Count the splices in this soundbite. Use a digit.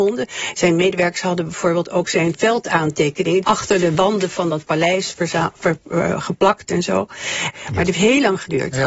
3